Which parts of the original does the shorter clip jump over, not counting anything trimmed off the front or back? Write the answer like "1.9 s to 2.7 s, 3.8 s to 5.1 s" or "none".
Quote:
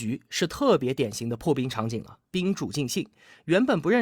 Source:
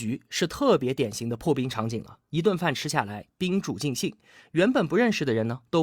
2.3 s to 3.3 s